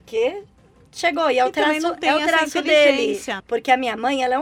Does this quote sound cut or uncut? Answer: cut